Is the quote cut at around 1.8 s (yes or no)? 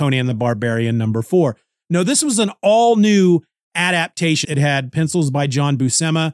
no